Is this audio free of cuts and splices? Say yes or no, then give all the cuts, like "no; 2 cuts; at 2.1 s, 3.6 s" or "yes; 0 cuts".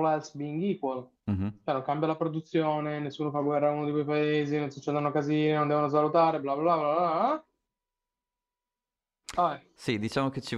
yes; 0 cuts